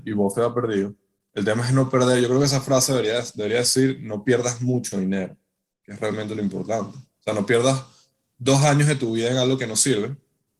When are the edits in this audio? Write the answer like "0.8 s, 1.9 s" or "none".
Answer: none